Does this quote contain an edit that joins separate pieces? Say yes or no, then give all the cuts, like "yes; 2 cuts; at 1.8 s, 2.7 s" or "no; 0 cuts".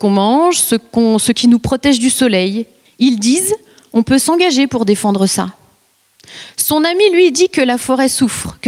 yes; 1 cut; at 2.9 s